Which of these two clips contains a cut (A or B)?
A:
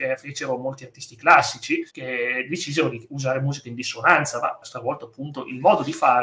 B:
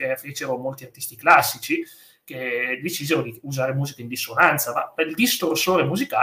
A